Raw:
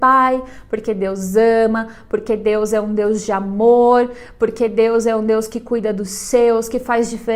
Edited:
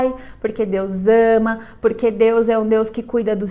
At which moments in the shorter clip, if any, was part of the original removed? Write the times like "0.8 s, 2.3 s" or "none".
1.8 s